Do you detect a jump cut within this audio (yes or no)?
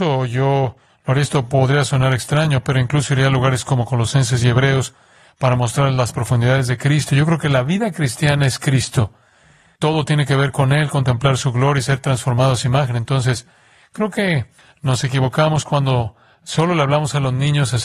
no